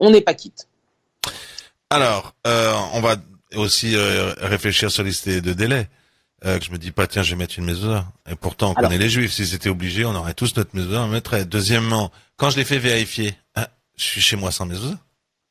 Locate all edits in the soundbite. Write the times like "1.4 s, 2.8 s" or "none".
6.6 s